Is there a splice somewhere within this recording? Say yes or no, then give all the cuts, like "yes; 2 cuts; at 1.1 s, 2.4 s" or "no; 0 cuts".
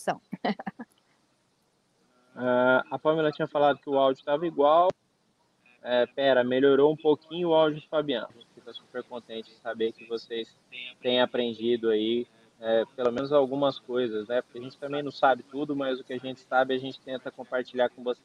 yes; 1 cut; at 8.3 s